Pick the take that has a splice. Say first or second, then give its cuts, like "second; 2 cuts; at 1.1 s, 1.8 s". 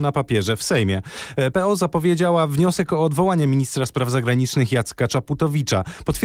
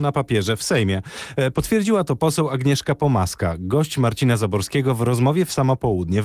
second; 1 cut; at 1.5 s